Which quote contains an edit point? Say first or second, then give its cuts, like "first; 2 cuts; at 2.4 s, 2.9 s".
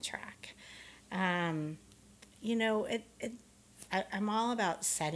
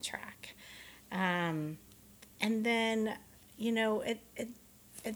first; 2 cuts; at 2.3 s, 3.9 s